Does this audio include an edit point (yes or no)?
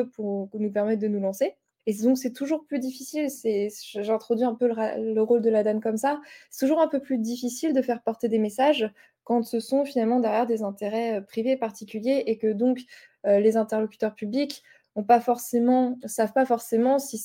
yes